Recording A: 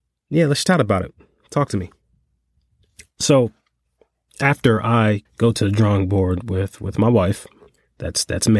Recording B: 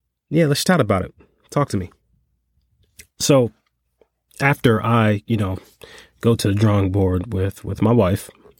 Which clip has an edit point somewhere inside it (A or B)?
A